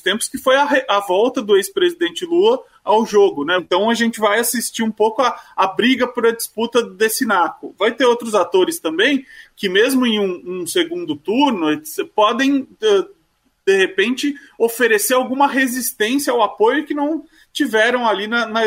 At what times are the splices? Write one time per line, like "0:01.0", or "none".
0:03.6